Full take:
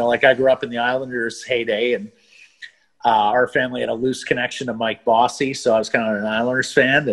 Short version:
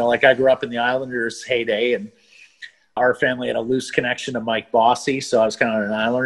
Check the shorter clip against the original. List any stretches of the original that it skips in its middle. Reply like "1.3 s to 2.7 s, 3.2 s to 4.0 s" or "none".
3.0 s to 3.3 s